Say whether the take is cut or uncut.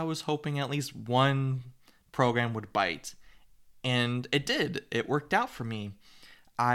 uncut